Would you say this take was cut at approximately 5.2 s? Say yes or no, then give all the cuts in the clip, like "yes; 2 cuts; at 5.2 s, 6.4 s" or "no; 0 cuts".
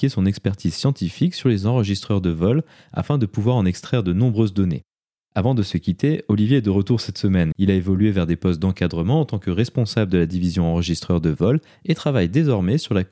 yes; 2 cuts; at 5.2 s, 7.5 s